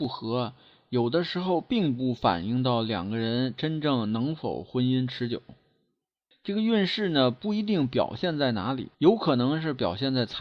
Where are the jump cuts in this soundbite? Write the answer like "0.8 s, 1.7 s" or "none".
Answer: 6.3 s, 8.9 s